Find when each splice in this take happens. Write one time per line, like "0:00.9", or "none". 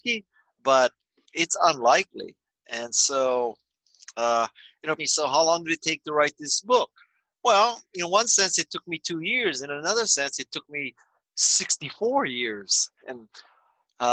0:05.0
0:13.0